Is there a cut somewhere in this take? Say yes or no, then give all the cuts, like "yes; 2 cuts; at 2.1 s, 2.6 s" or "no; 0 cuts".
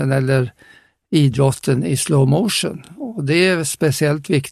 no; 0 cuts